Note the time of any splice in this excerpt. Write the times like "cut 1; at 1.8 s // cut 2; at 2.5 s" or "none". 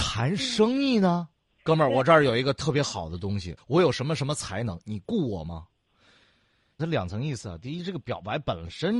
cut 1; at 1.6 s // cut 2; at 3.6 s // cut 3; at 6.8 s